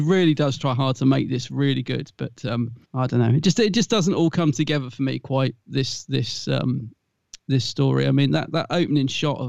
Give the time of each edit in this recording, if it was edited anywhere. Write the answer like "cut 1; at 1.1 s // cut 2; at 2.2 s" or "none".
cut 1; at 2.8 s